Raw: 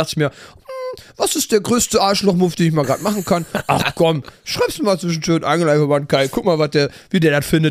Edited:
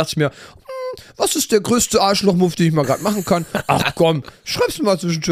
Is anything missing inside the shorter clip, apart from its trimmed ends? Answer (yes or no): no